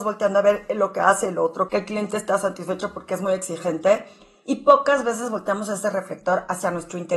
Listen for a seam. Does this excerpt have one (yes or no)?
yes